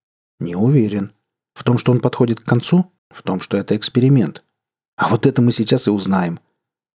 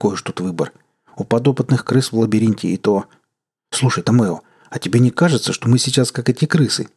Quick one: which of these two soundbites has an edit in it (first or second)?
first